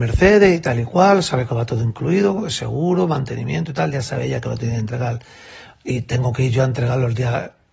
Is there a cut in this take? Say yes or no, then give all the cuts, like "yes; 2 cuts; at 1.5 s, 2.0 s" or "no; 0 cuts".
no; 0 cuts